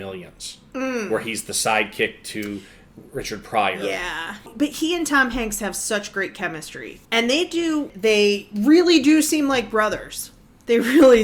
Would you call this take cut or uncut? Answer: cut